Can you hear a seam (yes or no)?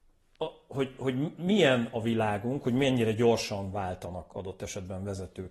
no